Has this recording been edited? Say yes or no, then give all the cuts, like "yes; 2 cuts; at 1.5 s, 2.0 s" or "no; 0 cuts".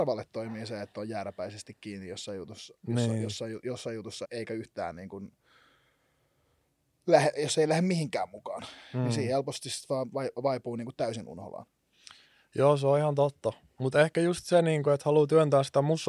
yes; 1 cut; at 4.2 s